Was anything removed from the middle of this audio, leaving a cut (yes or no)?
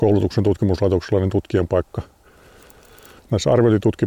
no